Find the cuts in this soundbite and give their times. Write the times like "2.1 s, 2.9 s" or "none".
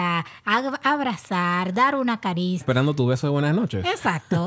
2.6 s